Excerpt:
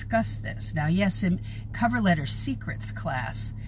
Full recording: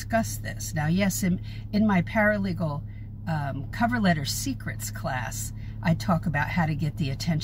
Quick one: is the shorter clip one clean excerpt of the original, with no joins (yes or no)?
no